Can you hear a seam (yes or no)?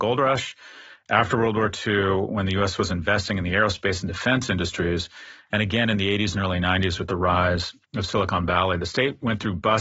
yes